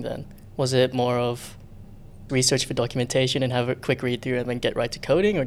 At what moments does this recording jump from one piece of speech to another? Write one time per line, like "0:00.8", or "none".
0:02.3